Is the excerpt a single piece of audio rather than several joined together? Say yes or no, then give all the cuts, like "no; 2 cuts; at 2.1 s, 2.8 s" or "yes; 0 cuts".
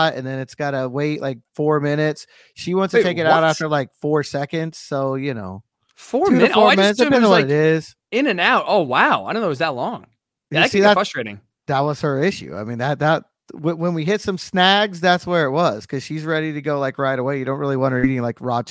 yes; 0 cuts